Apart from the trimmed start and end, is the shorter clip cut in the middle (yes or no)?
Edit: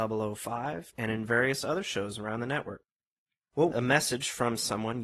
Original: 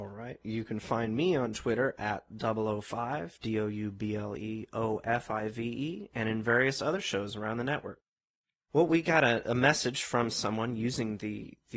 yes